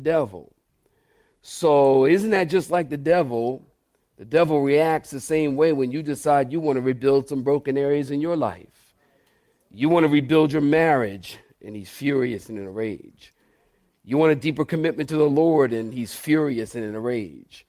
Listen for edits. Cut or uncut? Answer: uncut